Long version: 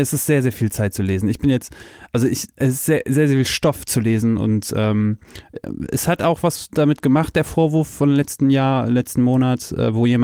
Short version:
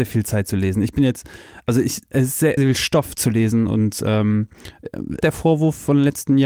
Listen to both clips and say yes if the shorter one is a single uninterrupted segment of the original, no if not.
no